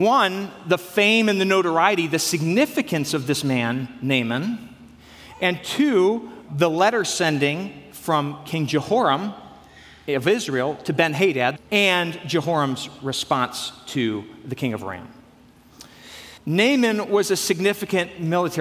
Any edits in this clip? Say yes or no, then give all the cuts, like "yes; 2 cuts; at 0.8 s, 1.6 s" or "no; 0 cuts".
yes; 3 cuts; at 6.5 s, 11.6 s, 16.4 s